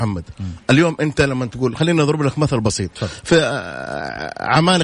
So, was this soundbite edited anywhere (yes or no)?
yes